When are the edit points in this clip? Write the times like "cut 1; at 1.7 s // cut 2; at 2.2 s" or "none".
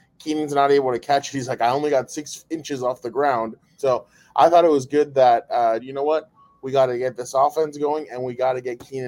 cut 1; at 3.8 s // cut 2; at 5.8 s